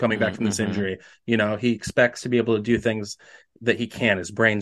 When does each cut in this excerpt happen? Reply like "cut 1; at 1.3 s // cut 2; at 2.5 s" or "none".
none